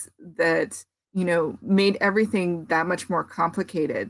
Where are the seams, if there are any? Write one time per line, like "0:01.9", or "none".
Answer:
0:01.0